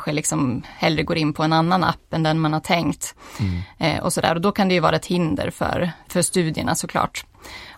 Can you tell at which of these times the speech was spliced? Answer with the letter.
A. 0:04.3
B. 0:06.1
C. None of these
B